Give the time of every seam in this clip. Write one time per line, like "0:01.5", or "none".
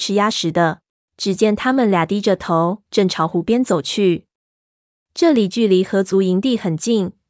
0:01.0
0:02.9